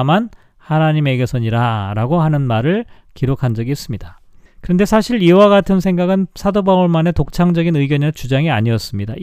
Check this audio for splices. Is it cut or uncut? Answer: cut